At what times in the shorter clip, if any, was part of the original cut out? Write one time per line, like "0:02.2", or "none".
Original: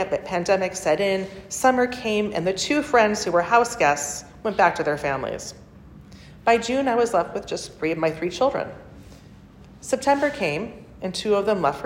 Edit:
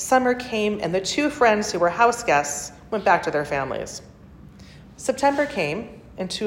0:04.8